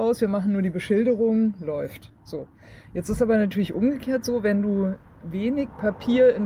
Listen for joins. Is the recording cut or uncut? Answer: uncut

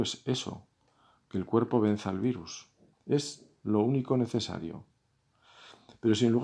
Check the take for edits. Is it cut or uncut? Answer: cut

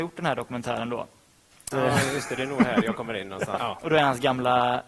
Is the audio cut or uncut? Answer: cut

